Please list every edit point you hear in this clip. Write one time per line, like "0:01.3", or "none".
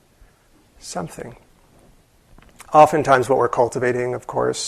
none